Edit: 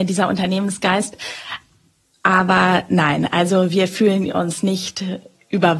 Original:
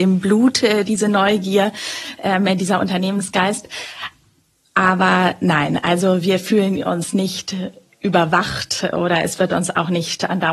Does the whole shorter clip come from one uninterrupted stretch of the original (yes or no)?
yes